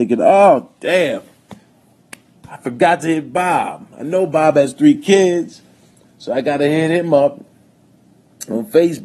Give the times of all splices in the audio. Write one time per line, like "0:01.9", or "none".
none